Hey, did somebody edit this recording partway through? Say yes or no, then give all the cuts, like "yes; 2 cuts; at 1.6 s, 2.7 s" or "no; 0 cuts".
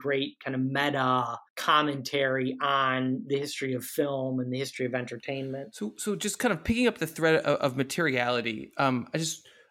yes; 1 cut; at 1.5 s